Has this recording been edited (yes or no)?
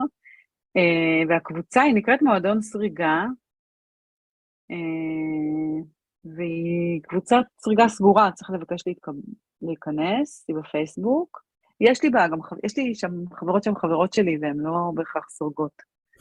no